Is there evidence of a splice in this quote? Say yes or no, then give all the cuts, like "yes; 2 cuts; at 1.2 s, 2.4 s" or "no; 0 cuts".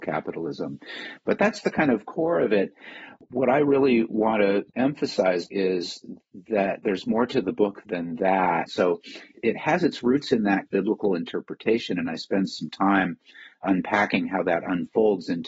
yes; 2 cuts; at 5.5 s, 8.7 s